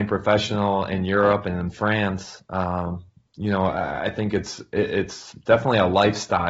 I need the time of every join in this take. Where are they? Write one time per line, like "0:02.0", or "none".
none